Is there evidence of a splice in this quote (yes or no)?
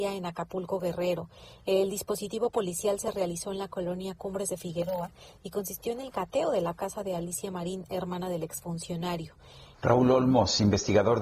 yes